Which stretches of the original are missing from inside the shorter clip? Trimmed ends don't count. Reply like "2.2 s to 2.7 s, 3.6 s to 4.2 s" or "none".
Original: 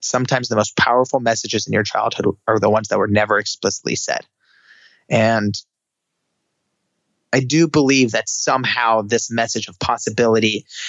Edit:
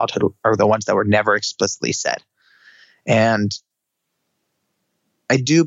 none